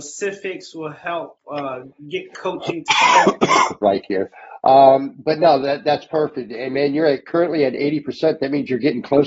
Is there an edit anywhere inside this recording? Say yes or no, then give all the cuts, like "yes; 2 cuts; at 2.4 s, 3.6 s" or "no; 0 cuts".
yes; 1 cut; at 3.8 s